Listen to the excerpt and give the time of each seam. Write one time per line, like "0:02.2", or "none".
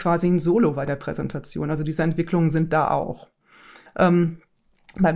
0:03.9